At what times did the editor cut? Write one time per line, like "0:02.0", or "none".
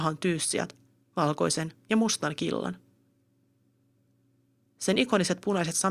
none